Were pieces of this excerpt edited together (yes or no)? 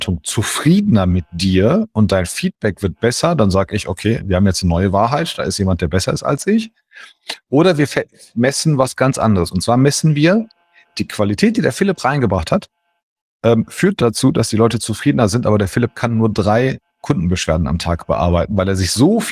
no